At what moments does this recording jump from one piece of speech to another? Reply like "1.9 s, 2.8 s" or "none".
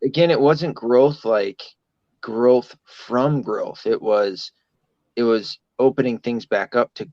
none